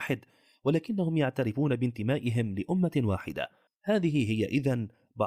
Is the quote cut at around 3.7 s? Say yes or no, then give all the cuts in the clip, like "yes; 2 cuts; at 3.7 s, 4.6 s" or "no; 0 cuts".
yes; 1 cut; at 3.7 s